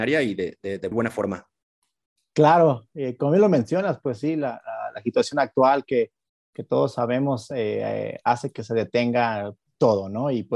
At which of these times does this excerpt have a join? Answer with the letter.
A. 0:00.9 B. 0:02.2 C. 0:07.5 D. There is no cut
A